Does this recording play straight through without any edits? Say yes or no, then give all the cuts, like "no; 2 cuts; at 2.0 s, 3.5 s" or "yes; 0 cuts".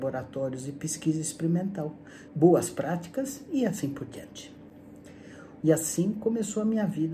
no; 2 cuts; at 2.3 s, 5.6 s